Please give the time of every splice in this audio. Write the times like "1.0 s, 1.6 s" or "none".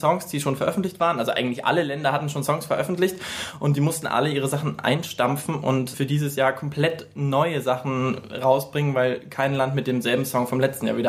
5.9 s